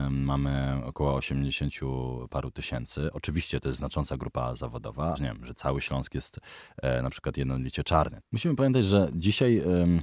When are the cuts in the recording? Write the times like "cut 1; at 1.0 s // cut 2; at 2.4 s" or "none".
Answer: cut 1; at 5.1 s // cut 2; at 8.2 s